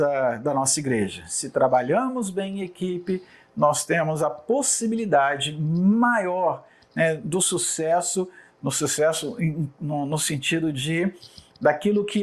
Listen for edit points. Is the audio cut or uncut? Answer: uncut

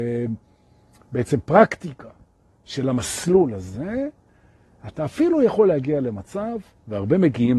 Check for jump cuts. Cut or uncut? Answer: uncut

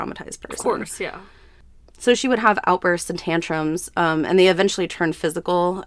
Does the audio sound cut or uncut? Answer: uncut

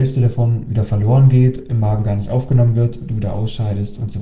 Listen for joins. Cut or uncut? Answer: uncut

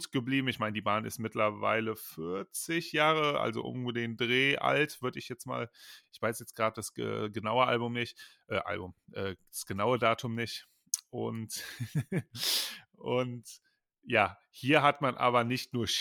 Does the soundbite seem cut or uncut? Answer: uncut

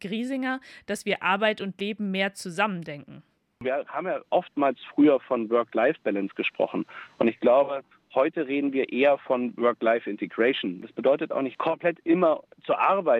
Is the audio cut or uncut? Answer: uncut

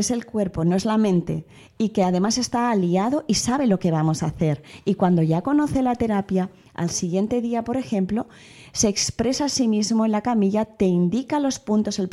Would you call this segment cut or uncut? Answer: uncut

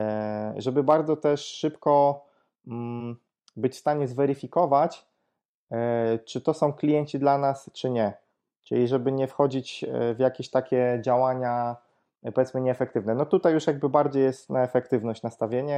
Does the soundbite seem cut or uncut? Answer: uncut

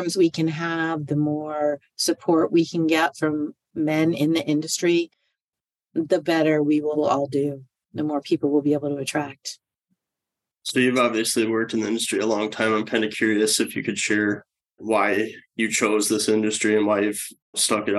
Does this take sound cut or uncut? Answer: uncut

